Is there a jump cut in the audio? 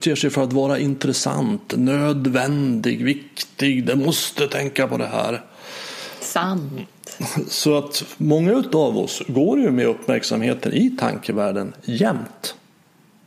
no; 0 cuts

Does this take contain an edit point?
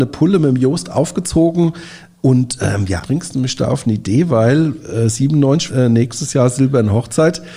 yes; 2 cuts; at 3.0 s, 5.7 s

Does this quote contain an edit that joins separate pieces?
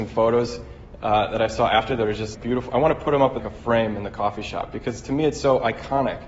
yes; 2 cuts; at 2.3 s, 3.4 s

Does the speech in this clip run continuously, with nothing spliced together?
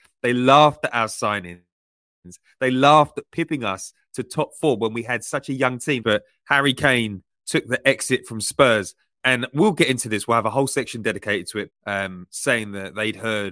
no; 2 cuts; at 6.0 s, 11.7 s

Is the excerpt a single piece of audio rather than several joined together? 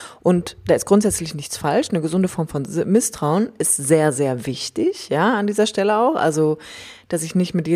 yes; 0 cuts

